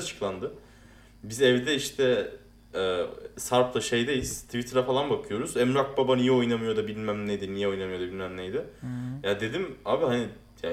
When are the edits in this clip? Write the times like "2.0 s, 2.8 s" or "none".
none